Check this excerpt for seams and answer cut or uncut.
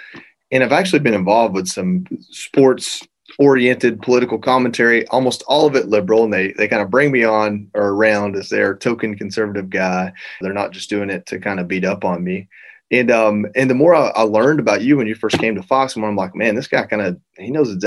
cut